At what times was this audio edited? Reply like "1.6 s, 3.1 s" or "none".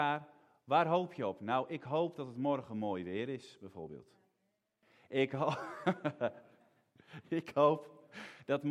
none

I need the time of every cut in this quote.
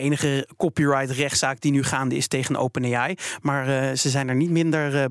none

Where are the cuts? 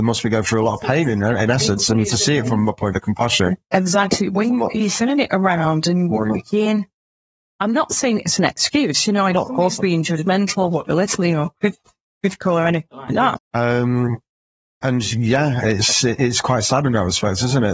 13.4 s

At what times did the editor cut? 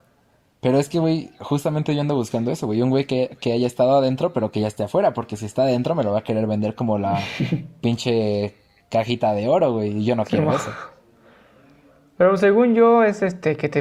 none

